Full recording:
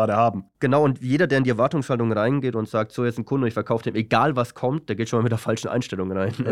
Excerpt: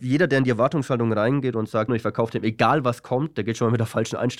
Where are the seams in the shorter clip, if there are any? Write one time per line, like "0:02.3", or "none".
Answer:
0:01.9